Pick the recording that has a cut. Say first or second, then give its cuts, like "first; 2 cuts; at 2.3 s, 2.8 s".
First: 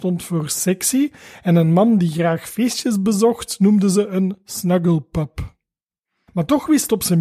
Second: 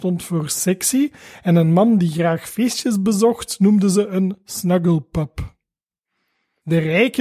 first; 1 cut; at 6.3 s